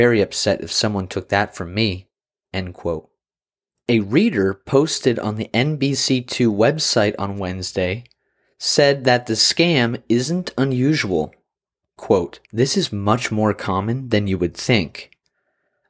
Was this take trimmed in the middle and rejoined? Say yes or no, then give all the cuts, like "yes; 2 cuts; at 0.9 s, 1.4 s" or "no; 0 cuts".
yes; 1 cut; at 12.4 s